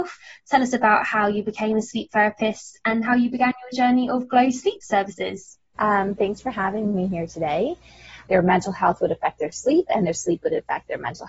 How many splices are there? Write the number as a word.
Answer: two